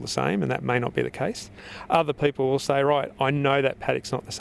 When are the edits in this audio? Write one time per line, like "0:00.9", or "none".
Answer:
none